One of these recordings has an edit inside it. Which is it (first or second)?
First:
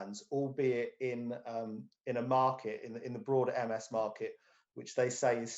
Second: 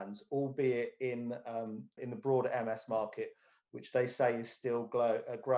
second